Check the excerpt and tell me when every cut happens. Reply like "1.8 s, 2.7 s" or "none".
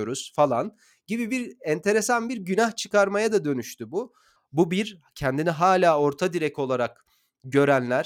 4.4 s